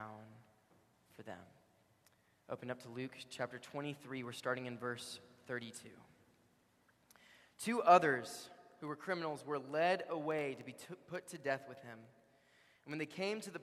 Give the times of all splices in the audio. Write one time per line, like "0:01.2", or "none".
none